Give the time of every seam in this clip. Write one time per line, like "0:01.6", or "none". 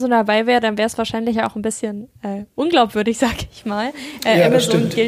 none